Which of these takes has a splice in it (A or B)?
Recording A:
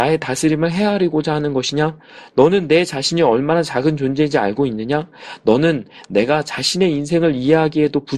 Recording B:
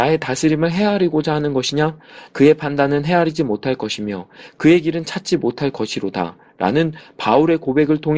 B